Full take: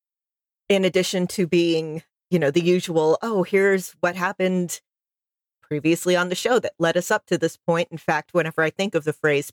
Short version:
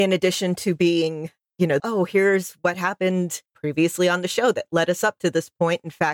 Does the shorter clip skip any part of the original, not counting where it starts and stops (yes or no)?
yes